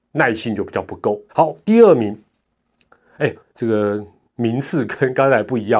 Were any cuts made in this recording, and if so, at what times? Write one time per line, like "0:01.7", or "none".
0:01.3
0:03.4